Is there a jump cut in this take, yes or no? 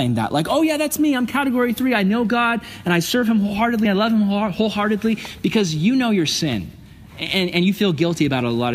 no